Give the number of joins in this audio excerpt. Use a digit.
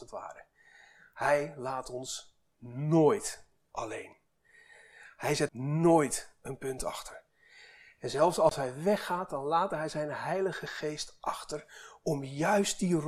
1